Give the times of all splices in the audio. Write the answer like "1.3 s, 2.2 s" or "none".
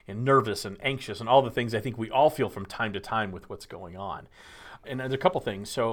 4.8 s

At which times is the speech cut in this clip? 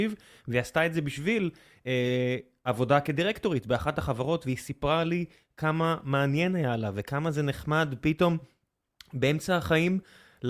none

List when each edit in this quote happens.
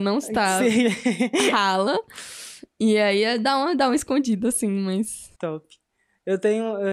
5.3 s

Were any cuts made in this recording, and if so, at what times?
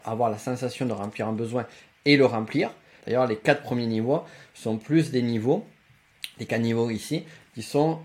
3.0 s

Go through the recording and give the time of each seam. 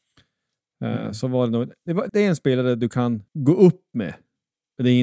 2.1 s, 3.3 s

